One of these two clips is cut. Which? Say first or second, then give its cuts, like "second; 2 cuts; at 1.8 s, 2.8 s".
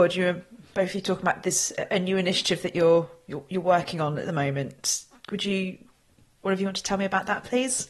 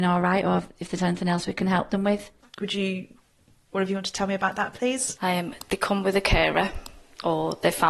second; 2 cuts; at 2.4 s, 5.2 s